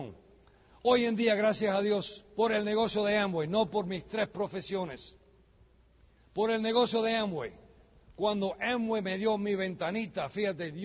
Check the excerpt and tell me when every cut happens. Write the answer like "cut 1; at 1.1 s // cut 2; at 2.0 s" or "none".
none